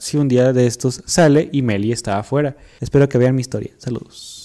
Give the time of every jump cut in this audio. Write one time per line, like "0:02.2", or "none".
0:02.8